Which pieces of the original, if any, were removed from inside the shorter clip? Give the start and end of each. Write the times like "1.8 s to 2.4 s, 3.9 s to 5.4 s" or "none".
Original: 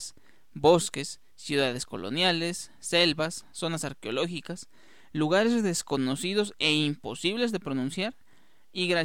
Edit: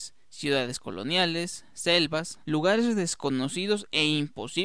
3.5 s to 5.1 s